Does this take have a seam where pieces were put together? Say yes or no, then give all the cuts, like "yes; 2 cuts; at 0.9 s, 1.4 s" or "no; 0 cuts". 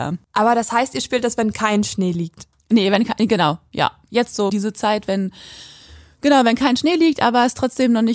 yes; 1 cut; at 4.5 s